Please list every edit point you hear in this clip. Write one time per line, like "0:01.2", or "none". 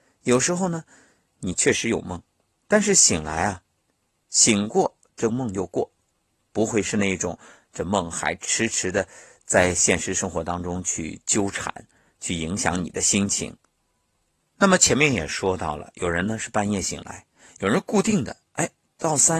0:14.4

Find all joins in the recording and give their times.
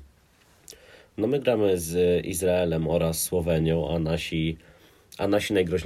none

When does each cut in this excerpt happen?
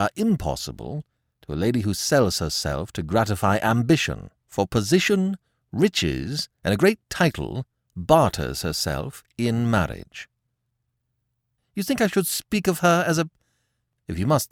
0:04.4
0:11.6

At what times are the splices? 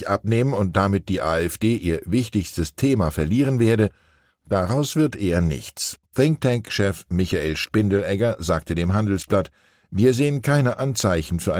0:06.0

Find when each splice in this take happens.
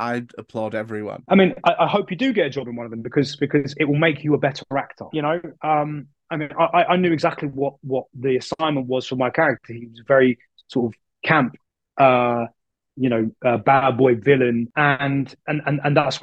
0:05.1

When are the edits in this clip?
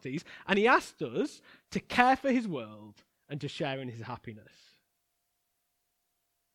none

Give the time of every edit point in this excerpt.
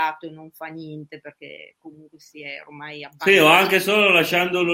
none

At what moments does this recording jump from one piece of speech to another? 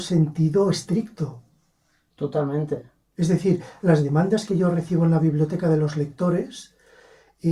0:02.1

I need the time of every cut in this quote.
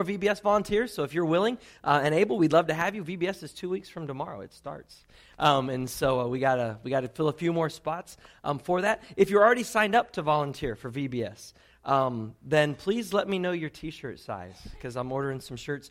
none

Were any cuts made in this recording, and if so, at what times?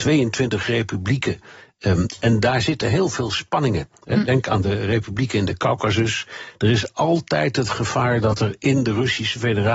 none

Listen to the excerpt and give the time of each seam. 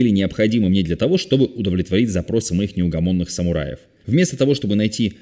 0:04.0

